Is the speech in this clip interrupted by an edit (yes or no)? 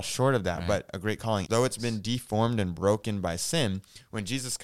yes